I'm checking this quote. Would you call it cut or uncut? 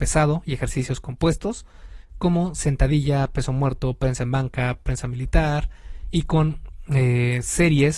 uncut